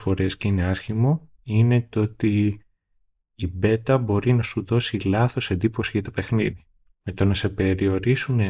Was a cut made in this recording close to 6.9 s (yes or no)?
yes